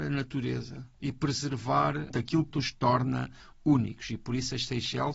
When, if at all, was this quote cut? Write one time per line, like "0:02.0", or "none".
0:02.5